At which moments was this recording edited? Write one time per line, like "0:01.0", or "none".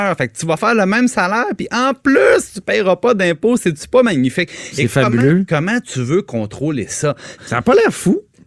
0:07.4